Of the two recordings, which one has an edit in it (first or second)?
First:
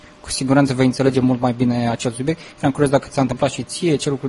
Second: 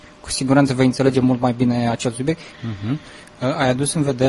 second